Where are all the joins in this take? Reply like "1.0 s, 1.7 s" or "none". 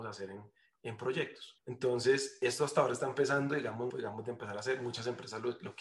1.6 s, 3.9 s